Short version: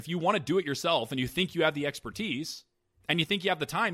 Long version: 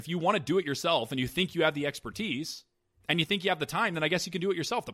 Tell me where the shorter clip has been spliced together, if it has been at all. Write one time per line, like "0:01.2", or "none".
none